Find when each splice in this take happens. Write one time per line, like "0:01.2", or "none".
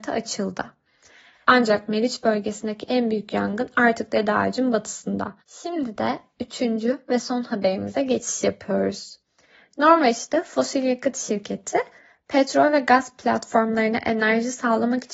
0:01.4
0:05.4